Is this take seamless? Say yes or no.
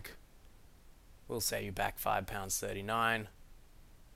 no